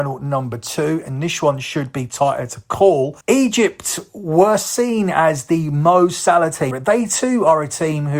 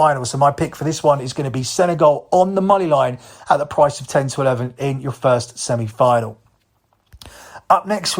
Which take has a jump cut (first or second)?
first